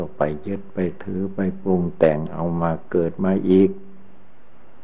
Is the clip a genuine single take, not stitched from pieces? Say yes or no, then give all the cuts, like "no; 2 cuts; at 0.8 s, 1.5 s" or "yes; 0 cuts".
yes; 0 cuts